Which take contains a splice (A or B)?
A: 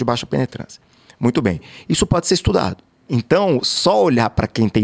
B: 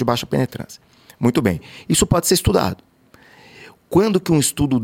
A